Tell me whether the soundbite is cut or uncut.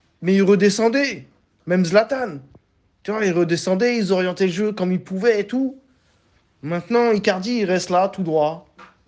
uncut